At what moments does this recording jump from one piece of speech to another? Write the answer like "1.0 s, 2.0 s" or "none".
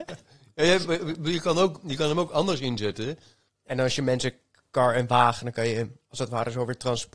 3.5 s